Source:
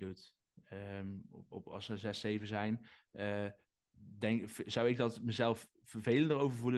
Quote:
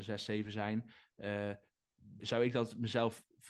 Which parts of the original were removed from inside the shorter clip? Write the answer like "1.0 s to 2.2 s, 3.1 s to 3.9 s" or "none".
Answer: 4.2 s to 4.6 s